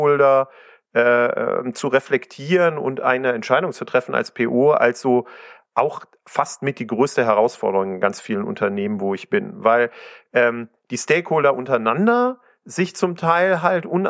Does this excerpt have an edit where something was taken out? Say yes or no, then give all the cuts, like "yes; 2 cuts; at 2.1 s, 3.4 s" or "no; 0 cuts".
no; 0 cuts